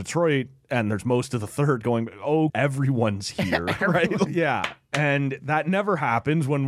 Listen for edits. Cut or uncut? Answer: cut